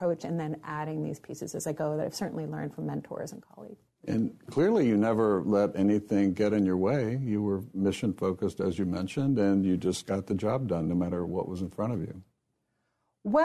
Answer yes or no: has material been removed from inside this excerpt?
no